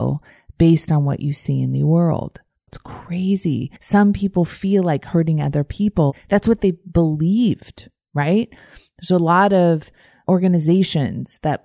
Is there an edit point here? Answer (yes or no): yes